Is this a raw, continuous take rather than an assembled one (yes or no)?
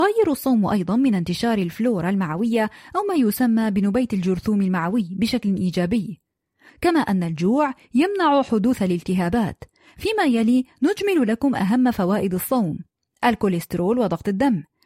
no